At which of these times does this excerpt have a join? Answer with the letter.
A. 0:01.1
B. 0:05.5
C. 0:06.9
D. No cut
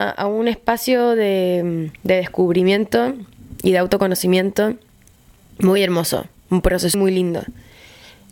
C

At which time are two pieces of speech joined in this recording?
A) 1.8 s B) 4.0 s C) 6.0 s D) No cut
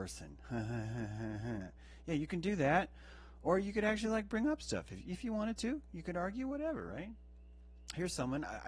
D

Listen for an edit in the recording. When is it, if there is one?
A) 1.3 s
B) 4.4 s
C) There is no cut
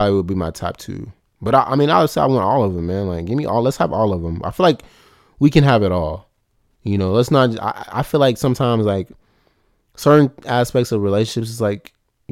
C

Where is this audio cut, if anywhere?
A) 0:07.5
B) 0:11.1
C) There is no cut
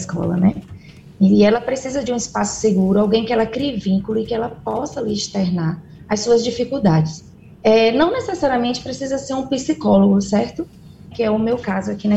B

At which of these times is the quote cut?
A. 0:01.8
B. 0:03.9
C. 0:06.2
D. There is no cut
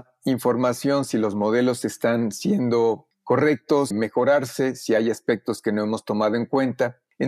B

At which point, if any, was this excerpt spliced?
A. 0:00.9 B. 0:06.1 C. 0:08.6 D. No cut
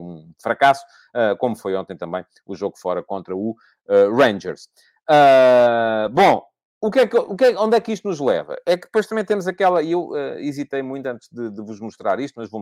D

